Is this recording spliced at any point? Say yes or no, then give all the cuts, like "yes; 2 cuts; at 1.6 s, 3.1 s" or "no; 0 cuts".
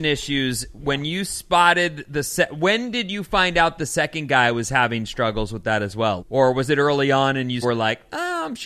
yes; 2 cuts; at 6.2 s, 7.6 s